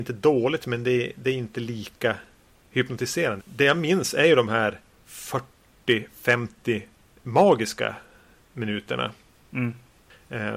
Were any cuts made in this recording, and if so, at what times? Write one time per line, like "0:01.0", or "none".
0:03.4

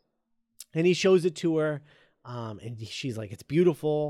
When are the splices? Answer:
none

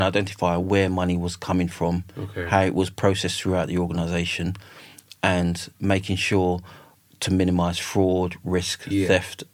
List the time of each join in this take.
none

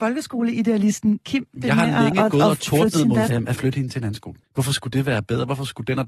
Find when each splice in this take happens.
0:03.3
0:04.4

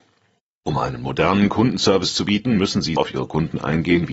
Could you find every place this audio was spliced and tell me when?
0:03.0

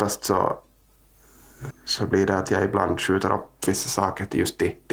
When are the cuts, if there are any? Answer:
0:01.7

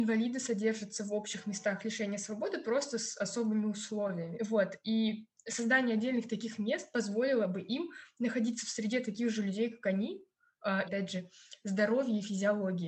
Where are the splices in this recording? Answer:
0:04.3
0:10.8

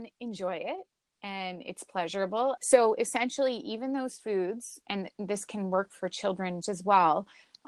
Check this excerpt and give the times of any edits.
0:02.6
0:06.6

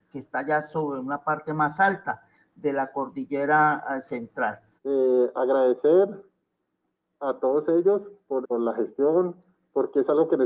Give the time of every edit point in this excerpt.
0:04.8
0:08.4

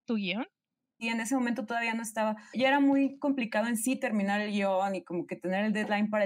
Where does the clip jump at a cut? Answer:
0:01.0
0:02.5

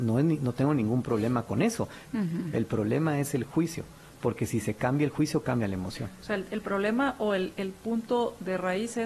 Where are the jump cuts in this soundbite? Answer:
0:02.0

